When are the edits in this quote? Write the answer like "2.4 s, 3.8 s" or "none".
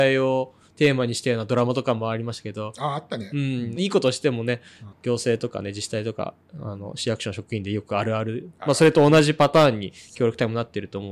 3.8 s, 4.9 s